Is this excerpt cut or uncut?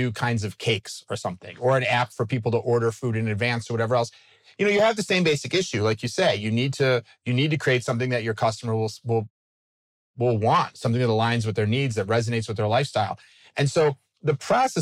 uncut